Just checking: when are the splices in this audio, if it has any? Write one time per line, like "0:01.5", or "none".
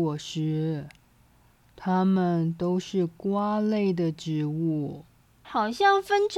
0:05.4